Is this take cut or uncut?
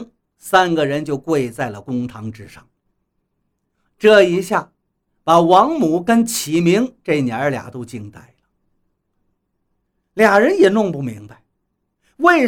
cut